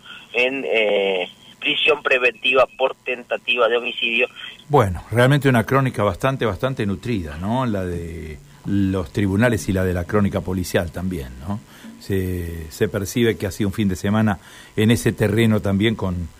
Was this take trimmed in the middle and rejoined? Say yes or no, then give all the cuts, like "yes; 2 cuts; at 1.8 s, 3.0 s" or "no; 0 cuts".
yes; 1 cut; at 4.6 s